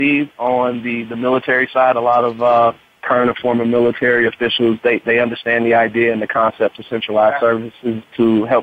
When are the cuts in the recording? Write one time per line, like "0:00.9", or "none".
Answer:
none